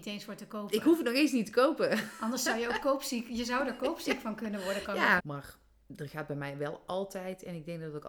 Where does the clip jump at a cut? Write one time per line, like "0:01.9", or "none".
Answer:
0:05.2

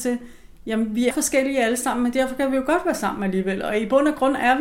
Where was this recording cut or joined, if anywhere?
0:01.1

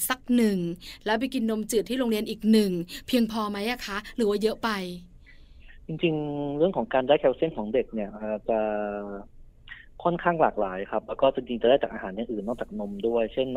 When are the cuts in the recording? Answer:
none

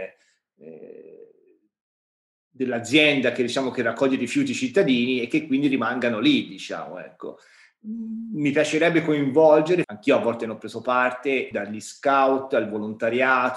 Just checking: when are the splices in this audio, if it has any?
0:09.8
0:11.5

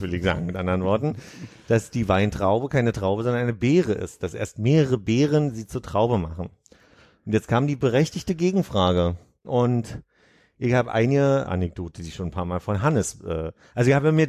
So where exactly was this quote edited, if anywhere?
0:09.4
0:11.5

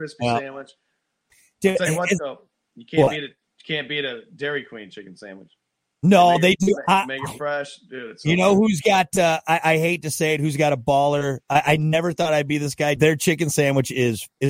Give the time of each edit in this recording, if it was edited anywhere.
0:13.0

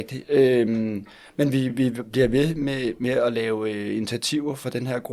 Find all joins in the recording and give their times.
none

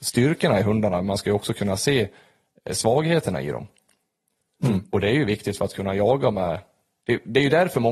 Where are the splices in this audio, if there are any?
none

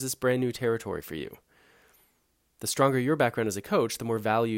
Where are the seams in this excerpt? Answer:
none

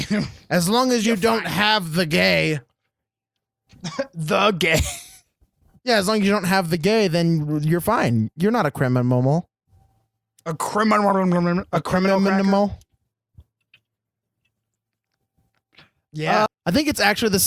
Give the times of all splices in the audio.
0:16.5

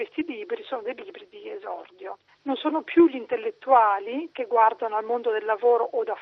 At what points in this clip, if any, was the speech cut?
0:02.3

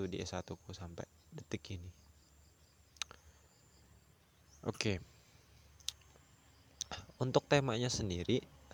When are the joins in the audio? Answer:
none

